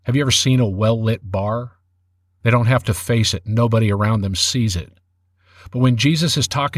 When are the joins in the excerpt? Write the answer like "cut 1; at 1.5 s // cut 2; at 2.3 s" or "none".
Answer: cut 1; at 2.4 s